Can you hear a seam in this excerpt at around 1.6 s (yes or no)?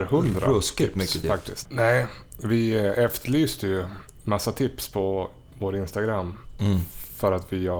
yes